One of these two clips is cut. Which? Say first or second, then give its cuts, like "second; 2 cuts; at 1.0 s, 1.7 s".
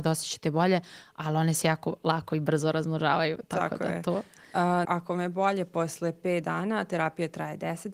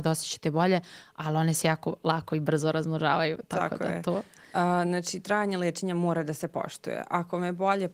first; 1 cut; at 4.8 s